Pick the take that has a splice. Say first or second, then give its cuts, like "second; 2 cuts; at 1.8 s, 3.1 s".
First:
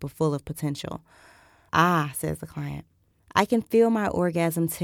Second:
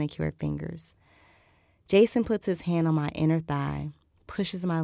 first; 2 cuts; at 1.7 s, 3.2 s